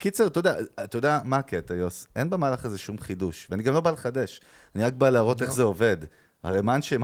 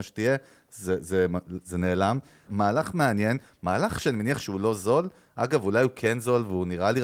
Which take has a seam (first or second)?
second